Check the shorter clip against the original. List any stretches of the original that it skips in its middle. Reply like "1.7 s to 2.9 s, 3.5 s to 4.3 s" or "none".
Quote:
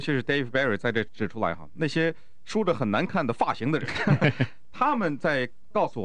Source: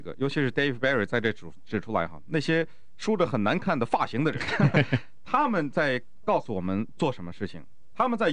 1.3 s to 1.6 s